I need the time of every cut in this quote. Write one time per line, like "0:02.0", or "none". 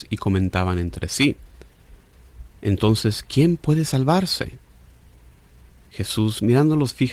none